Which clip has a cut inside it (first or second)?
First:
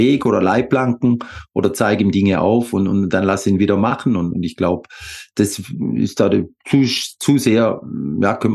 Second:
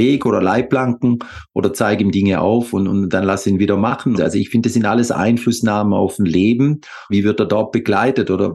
second